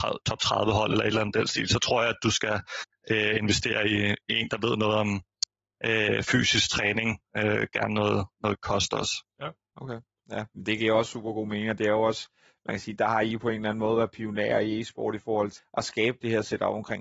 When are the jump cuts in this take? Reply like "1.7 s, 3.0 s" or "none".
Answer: 9.3 s, 15.6 s